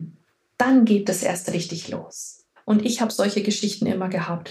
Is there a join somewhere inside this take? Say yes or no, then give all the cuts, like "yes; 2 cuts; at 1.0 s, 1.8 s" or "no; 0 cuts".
yes; 1 cut; at 2.6 s